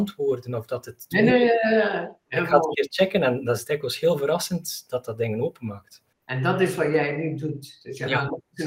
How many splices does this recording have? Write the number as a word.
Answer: one